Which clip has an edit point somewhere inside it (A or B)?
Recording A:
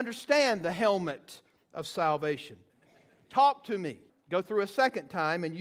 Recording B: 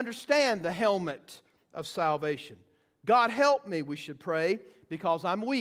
A